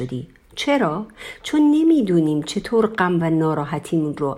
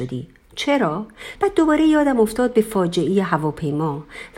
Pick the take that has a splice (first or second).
second